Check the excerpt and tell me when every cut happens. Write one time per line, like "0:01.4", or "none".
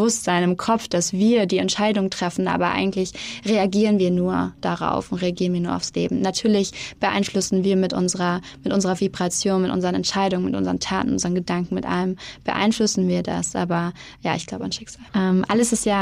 0:15.1